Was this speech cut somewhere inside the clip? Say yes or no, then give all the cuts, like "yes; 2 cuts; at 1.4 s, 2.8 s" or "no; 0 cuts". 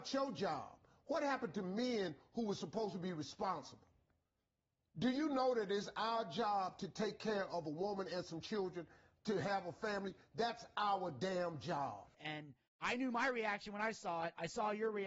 no; 0 cuts